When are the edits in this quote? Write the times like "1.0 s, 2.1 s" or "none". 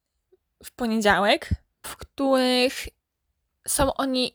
1.8 s